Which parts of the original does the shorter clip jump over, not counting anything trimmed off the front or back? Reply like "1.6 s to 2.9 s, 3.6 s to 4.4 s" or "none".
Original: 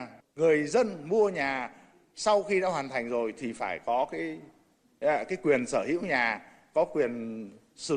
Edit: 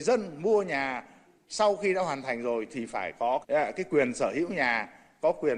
4.1 s to 5.0 s